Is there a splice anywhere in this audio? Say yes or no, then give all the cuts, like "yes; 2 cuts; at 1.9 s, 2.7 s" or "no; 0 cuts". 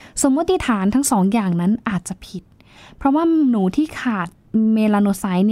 no; 0 cuts